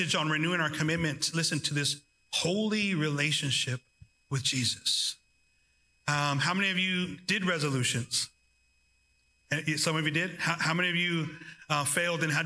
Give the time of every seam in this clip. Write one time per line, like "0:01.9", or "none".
none